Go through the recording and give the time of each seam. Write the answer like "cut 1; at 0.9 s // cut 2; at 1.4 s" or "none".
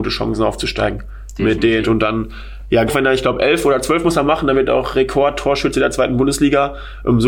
cut 1; at 1.8 s // cut 2; at 2.9 s